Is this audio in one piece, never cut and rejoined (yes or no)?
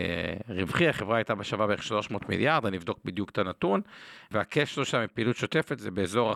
yes